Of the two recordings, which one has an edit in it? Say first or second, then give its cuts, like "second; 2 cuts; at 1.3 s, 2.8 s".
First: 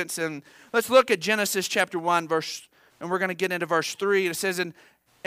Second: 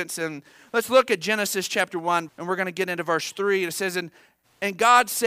second; 1 cut; at 2.3 s